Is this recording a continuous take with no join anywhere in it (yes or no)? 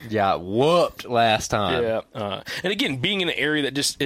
no